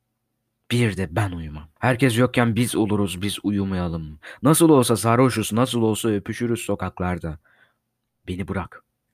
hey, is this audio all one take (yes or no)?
no